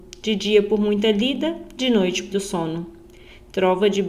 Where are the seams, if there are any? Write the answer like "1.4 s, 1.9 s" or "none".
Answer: 2.3 s

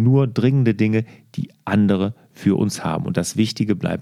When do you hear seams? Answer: none

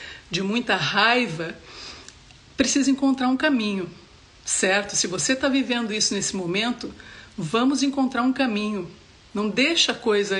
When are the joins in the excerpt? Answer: none

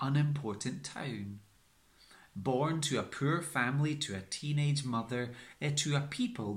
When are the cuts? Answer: none

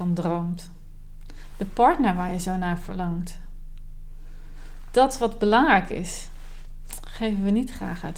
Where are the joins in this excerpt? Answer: none

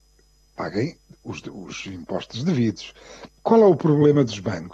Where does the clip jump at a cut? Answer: 3.3 s

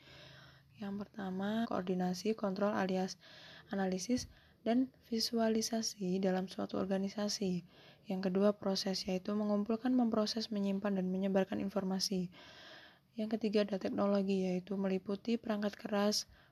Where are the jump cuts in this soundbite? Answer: 1.6 s

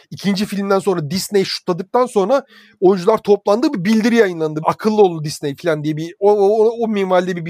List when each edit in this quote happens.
4.6 s

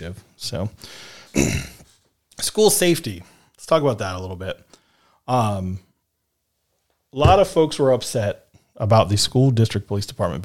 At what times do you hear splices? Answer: 1.3 s

